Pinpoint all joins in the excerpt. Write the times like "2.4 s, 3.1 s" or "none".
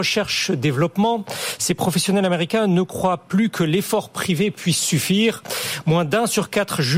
none